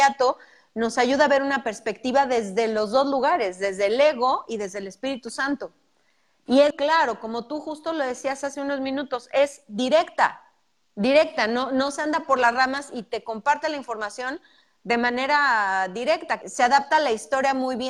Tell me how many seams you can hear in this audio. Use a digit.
2